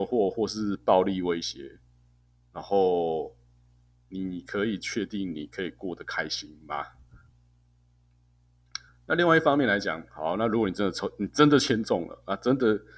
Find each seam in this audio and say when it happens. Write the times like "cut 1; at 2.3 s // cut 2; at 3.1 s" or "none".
none

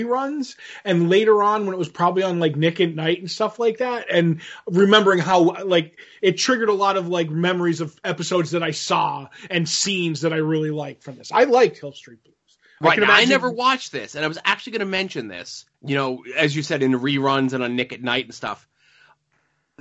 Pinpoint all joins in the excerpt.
cut 1; at 15.7 s

